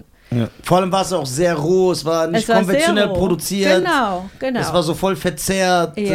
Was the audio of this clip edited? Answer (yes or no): no